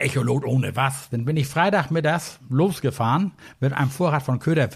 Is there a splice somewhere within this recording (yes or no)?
yes